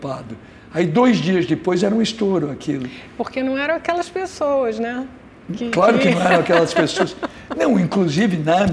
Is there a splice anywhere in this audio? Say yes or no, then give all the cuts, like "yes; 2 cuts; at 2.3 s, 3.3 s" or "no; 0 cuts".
no; 0 cuts